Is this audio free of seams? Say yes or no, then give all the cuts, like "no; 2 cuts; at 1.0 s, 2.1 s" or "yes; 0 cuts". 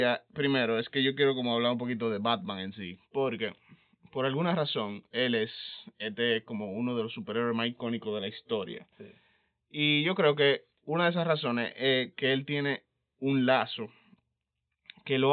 yes; 0 cuts